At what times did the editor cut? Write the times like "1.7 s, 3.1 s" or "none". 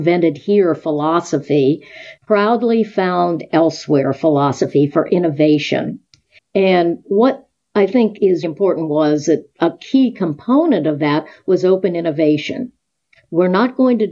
2.2 s, 6.4 s, 8.4 s